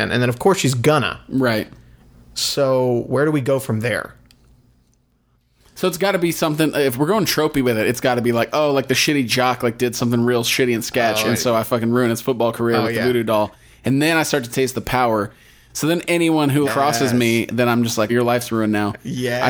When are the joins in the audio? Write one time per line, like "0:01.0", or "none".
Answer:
0:16.7
0:18.1